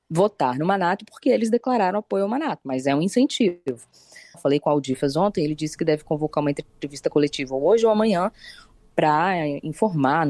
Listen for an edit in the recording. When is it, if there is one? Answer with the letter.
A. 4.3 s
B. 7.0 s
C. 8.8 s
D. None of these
A